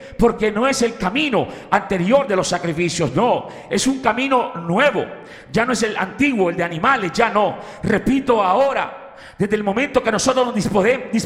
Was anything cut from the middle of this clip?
no; 0 cuts

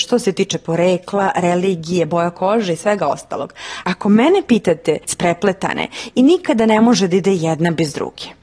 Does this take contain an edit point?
yes; 2 cuts; at 3.8 s, 5.1 s

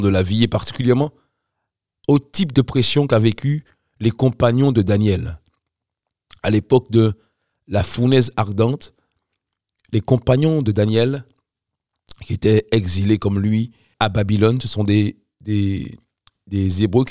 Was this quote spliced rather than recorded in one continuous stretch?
yes; 1 cut; at 13.9 s

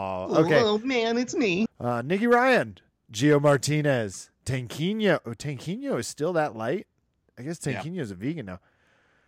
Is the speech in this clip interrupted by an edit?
yes; 1 cut; at 1.7 s

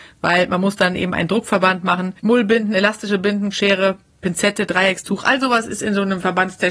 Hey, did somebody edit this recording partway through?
yes; 2 cuts; at 2.2 s, 3.5 s

